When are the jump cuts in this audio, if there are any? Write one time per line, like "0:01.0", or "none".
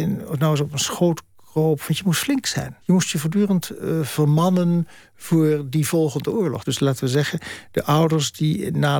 0:02.8
0:06.6